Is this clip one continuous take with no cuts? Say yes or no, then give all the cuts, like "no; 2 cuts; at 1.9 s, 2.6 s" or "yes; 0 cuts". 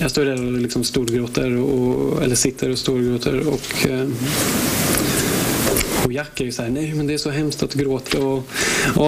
no; 1 cut; at 8.1 s